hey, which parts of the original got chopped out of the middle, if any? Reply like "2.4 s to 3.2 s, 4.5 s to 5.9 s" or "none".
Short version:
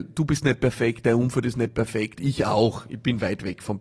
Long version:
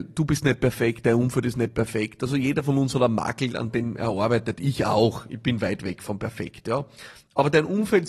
2.2 s to 4.6 s